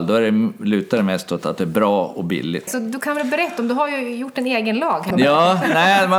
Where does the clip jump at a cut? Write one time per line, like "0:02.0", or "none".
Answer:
0:02.7
0:05.1